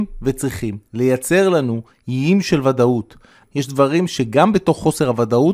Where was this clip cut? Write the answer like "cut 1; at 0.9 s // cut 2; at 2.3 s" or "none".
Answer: cut 1; at 3.4 s